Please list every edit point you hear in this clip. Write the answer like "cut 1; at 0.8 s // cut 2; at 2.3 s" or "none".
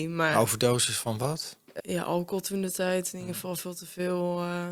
cut 1; at 1.8 s